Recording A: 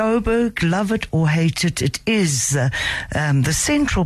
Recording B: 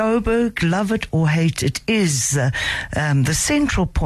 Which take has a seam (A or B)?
B